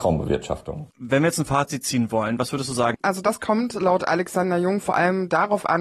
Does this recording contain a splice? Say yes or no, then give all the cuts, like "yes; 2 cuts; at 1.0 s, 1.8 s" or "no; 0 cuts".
yes; 2 cuts; at 0.9 s, 2.9 s